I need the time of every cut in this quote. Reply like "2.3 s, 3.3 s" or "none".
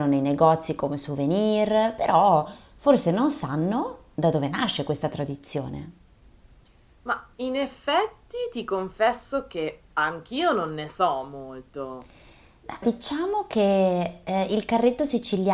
9.9 s, 12.8 s